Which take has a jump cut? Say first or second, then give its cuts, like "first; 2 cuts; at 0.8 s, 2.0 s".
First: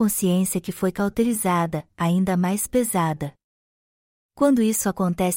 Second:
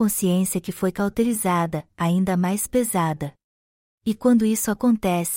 second; 1 cut; at 3.9 s